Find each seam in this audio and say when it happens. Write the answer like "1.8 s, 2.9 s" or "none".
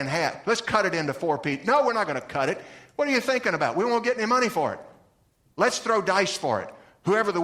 none